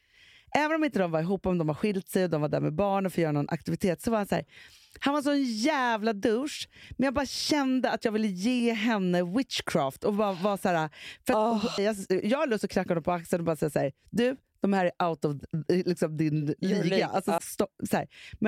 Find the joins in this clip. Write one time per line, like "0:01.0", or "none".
0:11.8
0:17.4